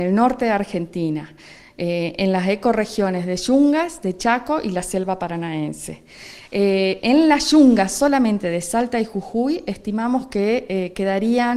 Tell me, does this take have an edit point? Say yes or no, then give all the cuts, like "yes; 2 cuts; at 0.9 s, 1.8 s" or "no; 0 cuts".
no; 0 cuts